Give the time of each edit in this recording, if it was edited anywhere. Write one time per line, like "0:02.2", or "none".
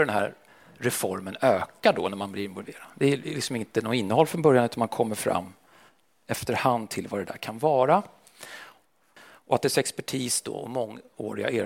0:02.9
0:09.2